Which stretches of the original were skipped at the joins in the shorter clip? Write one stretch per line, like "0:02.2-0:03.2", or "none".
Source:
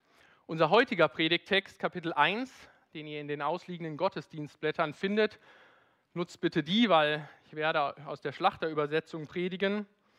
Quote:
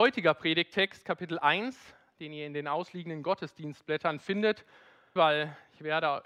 0:05.9-0:06.9